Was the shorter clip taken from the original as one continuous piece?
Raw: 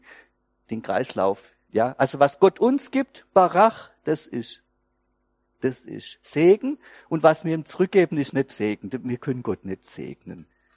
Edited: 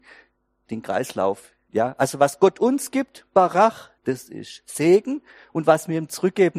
no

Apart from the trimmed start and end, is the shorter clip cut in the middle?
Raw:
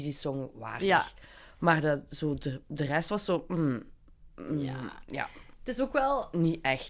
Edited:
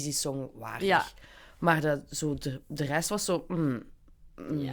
no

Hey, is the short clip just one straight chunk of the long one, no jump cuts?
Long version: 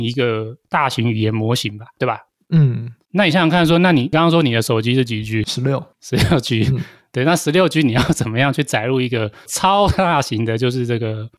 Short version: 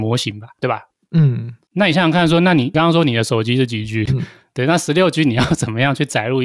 no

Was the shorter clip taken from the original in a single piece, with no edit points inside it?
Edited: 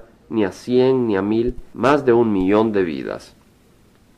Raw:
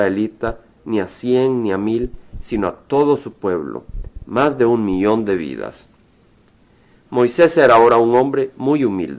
no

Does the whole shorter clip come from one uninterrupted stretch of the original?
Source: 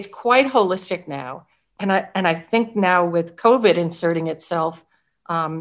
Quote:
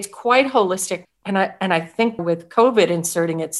no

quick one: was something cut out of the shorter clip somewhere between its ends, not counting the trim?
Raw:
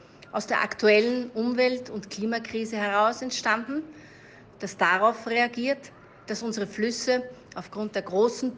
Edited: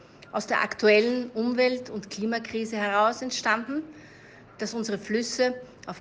yes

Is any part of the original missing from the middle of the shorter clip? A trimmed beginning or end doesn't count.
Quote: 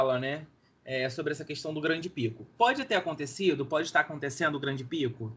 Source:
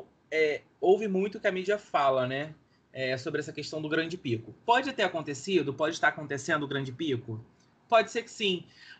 no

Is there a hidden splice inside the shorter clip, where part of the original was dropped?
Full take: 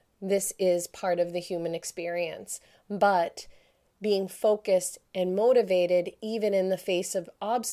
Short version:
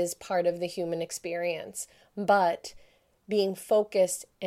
no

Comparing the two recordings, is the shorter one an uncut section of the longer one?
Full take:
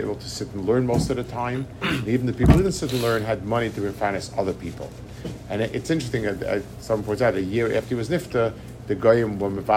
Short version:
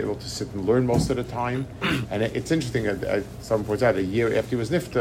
no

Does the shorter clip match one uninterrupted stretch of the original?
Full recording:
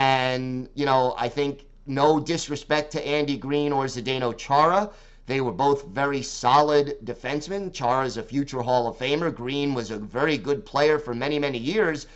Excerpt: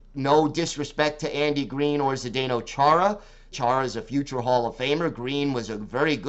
no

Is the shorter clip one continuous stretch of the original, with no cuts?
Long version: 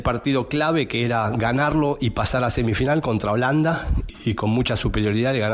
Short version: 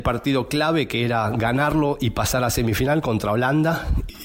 yes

